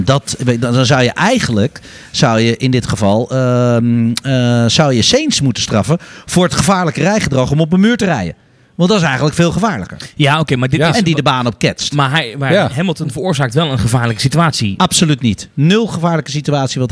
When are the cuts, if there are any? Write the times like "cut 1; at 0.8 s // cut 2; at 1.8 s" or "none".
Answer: none